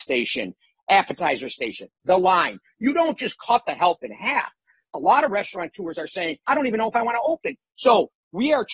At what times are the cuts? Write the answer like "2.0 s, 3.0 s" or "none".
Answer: 4.8 s, 6.4 s